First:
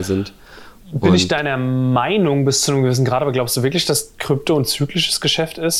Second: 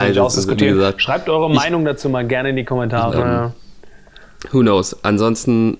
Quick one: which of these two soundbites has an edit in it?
second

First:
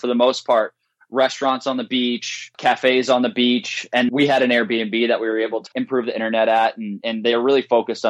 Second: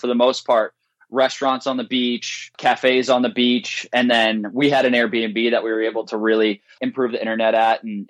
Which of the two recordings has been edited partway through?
first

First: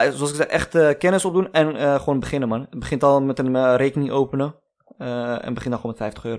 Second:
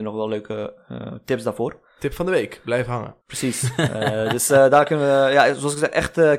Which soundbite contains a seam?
second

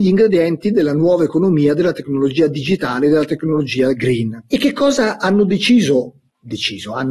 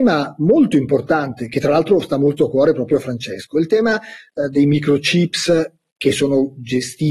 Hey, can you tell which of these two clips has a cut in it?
first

